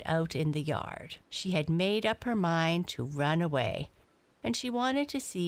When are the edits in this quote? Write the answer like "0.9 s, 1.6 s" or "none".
1.2 s